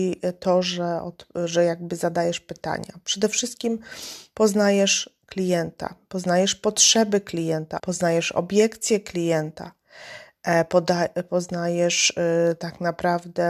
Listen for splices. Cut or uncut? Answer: cut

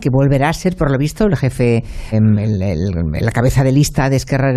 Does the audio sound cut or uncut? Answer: cut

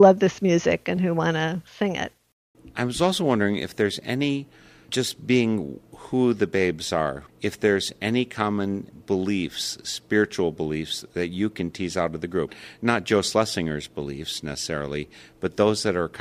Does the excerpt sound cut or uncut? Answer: uncut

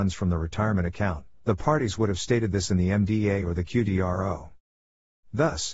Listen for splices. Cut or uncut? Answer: uncut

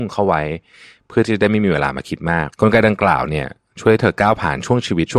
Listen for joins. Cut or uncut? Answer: cut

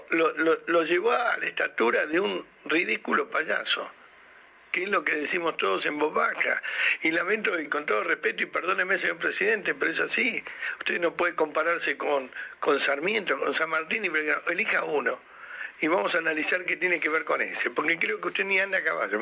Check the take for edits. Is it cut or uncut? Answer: uncut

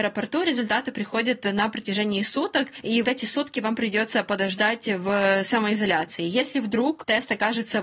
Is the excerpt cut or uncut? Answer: cut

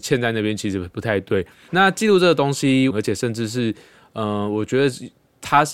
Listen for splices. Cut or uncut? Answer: cut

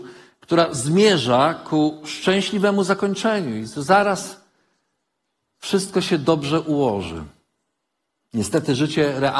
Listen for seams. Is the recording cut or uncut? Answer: uncut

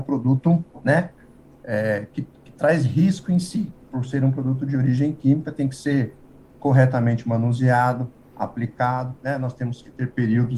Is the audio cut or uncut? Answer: uncut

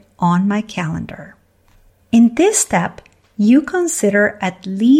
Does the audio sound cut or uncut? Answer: cut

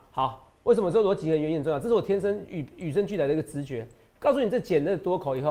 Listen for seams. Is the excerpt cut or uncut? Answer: uncut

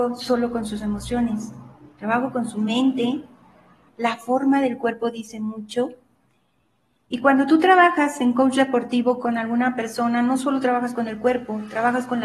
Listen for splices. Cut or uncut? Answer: cut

